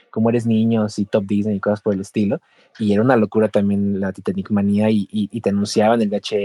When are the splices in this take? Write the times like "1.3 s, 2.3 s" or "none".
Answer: none